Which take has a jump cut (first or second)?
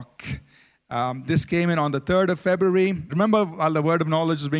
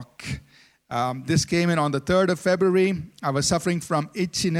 first